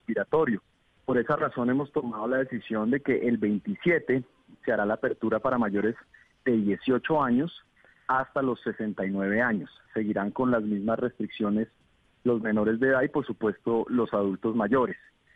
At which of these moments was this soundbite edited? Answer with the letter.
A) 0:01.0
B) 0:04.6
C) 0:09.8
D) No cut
A